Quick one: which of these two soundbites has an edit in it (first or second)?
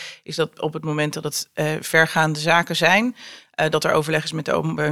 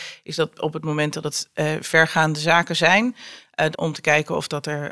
second